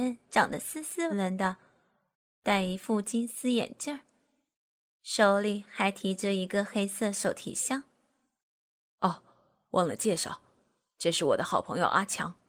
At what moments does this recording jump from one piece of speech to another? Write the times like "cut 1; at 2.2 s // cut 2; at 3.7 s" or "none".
cut 1; at 1.1 s